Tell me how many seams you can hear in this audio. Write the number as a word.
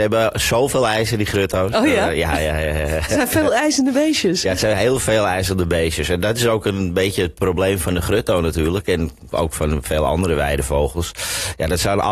zero